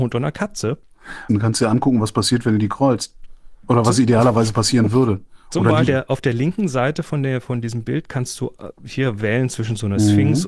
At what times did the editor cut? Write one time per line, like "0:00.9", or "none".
0:01.3
0:05.9